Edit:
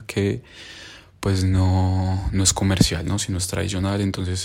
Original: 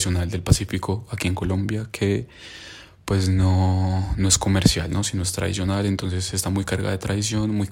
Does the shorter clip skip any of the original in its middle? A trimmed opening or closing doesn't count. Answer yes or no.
no